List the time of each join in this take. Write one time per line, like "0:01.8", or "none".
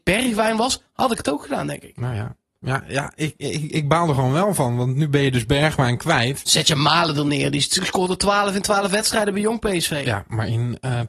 none